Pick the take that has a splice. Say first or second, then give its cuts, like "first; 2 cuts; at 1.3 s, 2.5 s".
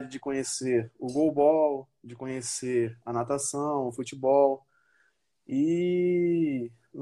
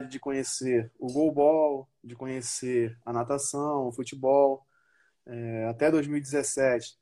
second; 1 cut; at 5.1 s